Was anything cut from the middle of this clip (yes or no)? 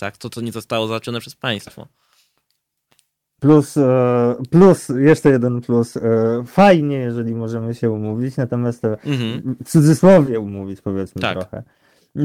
no